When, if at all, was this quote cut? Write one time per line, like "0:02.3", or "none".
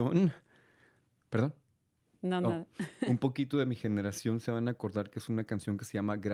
none